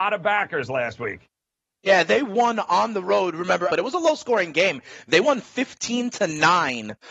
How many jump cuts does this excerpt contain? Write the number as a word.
one